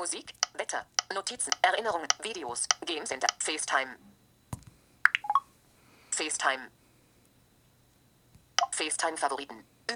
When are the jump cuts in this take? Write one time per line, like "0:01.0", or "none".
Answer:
none